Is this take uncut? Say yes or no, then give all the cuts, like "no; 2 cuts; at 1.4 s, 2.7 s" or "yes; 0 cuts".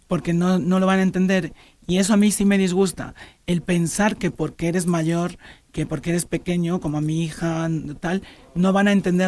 yes; 0 cuts